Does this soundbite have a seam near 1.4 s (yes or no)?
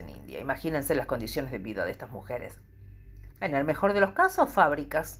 no